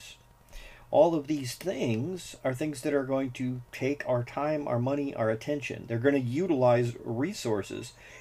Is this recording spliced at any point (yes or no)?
no